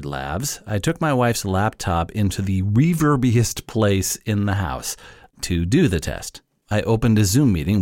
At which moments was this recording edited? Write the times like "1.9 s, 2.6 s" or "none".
5.3 s